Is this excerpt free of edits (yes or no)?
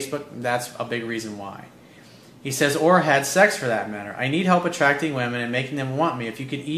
yes